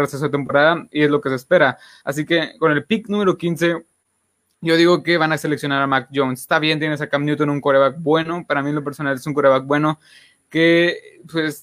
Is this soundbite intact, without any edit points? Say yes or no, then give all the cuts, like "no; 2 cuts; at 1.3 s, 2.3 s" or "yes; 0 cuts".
yes; 0 cuts